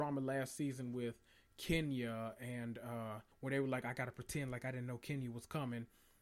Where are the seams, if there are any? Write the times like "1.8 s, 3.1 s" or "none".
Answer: 3.3 s